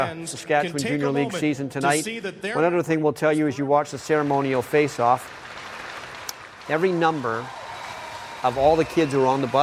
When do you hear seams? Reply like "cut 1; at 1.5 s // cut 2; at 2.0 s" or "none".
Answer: cut 1; at 6.6 s

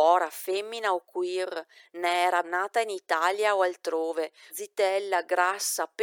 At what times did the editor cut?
cut 1; at 2.4 s // cut 2; at 4.5 s

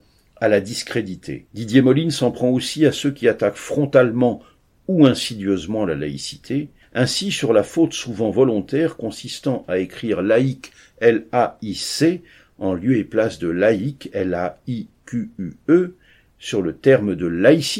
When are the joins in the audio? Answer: cut 1; at 1.5 s

